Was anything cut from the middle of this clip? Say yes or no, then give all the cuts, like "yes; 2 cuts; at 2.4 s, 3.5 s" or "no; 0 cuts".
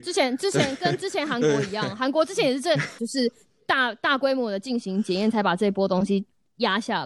yes; 1 cut; at 3.0 s